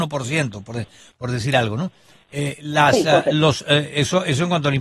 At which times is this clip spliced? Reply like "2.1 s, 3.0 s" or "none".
none